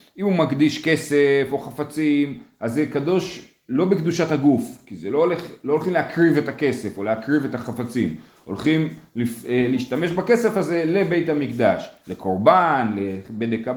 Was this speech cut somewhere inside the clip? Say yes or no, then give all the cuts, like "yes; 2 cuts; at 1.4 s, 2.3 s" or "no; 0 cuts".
no; 0 cuts